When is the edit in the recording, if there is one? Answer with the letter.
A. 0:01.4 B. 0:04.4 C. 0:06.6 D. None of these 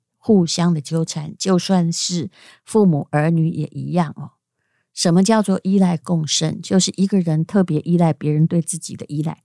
D